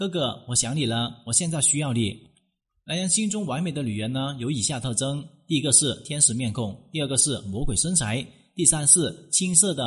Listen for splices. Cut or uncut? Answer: uncut